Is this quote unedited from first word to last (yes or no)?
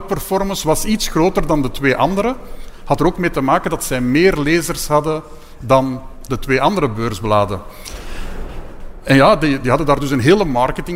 yes